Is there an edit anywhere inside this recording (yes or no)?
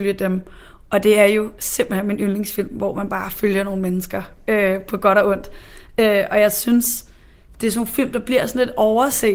no